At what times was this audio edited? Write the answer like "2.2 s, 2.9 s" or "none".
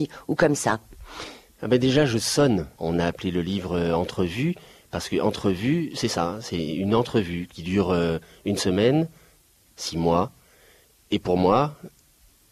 2.8 s, 9.7 s